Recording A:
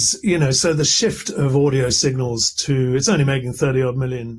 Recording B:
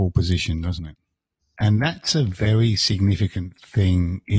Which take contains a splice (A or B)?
B